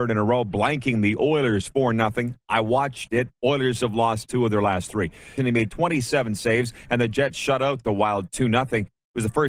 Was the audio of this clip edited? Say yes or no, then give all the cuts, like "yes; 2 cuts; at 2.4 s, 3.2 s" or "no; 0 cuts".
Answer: yes; 2 cuts; at 3.3 s, 5.4 s